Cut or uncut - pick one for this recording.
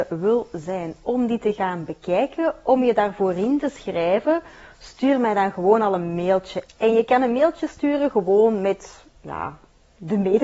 cut